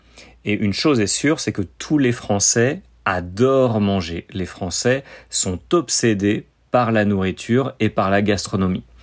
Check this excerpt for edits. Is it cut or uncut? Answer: uncut